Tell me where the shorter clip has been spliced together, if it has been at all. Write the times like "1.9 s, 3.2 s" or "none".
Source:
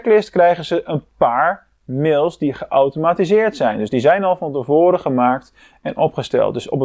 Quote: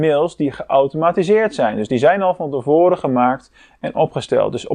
none